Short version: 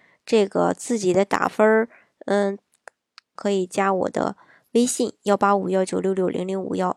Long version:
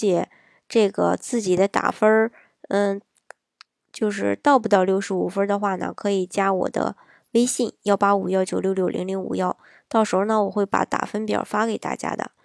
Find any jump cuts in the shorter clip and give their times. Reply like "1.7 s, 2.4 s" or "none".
3.4 s